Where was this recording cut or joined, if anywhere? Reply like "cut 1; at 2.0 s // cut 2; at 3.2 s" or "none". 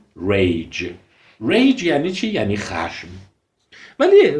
none